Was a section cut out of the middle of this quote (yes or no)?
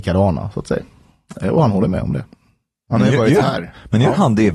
no